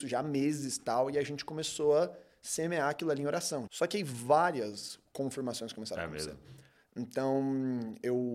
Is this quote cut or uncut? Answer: cut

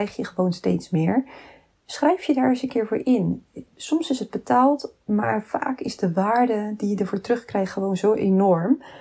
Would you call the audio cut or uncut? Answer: uncut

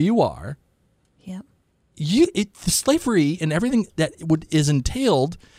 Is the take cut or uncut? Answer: uncut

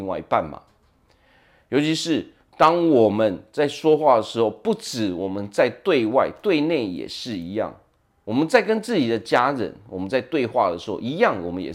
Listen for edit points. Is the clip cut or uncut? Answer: uncut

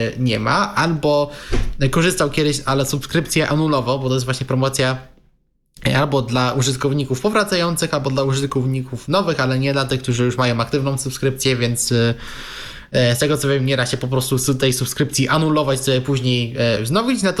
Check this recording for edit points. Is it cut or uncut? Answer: uncut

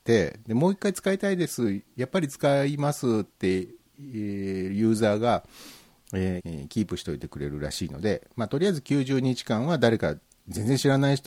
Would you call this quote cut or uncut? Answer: cut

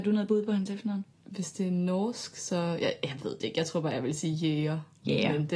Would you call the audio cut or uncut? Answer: cut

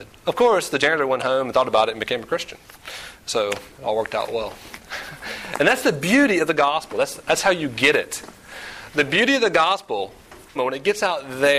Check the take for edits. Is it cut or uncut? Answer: cut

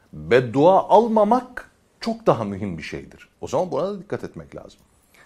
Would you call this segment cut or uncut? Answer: cut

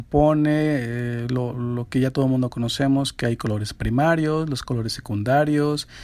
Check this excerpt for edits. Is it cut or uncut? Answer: cut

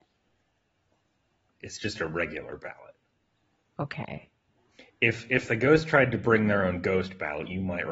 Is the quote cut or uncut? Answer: cut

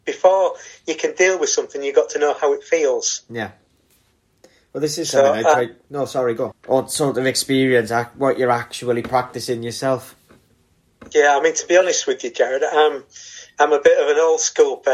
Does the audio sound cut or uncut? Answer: cut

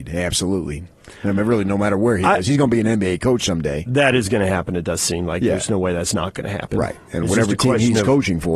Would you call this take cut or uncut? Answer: uncut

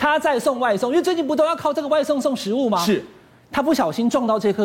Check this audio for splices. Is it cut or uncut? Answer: uncut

